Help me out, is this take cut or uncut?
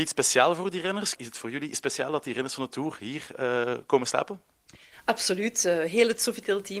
cut